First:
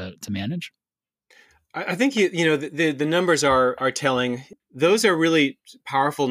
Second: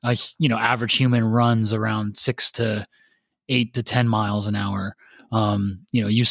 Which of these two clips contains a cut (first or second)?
first